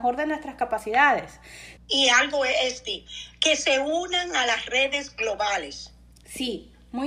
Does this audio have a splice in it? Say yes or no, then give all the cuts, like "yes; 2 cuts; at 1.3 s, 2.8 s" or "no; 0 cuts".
yes; 1 cut; at 1.8 s